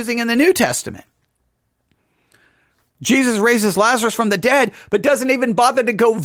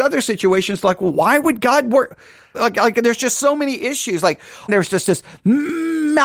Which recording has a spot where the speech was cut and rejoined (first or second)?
second